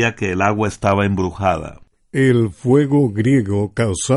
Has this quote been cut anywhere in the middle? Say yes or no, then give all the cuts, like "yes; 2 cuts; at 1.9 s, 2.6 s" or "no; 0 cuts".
no; 0 cuts